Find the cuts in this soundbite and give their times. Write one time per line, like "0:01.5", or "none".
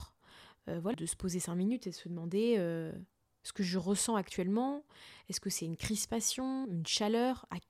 0:00.9
0:06.6